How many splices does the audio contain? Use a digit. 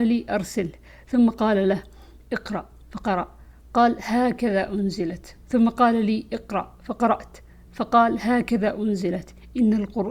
0